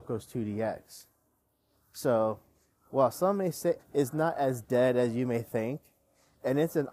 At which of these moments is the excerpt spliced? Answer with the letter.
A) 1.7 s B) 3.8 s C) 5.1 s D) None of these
B